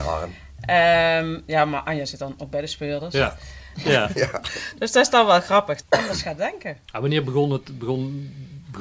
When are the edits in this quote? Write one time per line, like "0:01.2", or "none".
0:03.7
0:05.8